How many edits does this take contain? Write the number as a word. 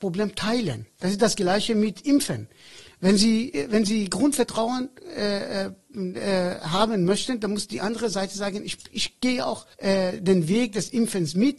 one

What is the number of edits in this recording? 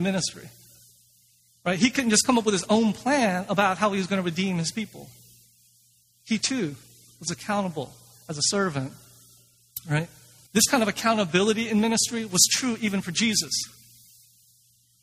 one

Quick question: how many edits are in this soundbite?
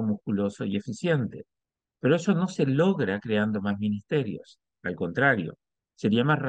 zero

